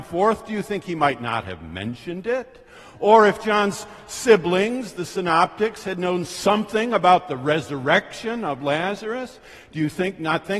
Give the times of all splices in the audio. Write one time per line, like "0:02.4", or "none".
none